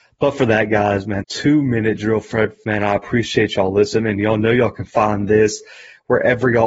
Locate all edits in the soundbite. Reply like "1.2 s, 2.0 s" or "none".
1.2 s, 2.6 s

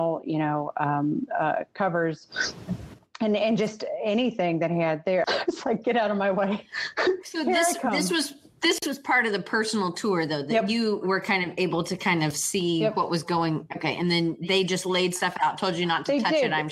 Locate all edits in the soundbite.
5.2 s

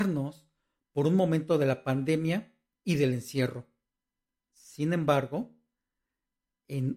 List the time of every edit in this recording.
none

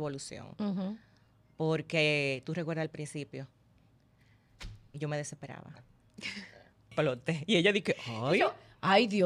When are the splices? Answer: 6.9 s

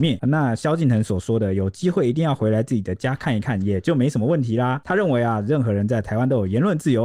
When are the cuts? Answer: none

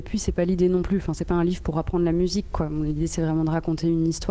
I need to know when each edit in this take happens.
none

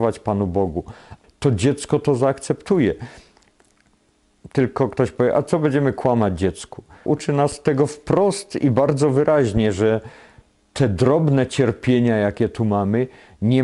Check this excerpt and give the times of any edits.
1.2 s, 7.1 s

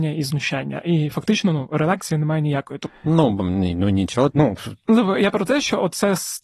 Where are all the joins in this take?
2.9 s, 4.3 s

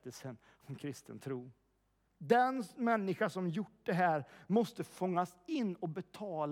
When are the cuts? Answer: 2.1 s

